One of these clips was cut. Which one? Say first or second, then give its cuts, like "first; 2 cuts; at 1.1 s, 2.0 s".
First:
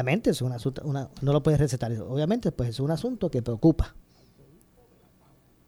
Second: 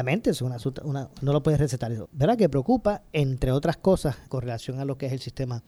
second; 2 cuts; at 2.0 s, 4.3 s